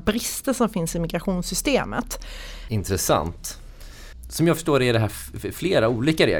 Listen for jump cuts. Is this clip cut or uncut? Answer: cut